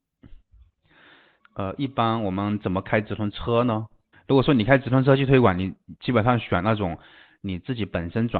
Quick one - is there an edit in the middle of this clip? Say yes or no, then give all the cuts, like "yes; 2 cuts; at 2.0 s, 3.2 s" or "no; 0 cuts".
yes; 2 cuts; at 1.4 s, 4.1 s